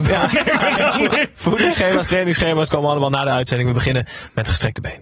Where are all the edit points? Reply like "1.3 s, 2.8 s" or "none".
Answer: none